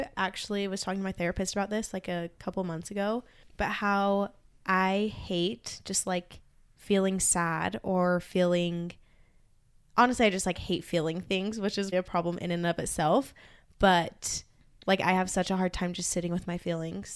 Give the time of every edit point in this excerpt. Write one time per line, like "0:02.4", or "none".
0:11.9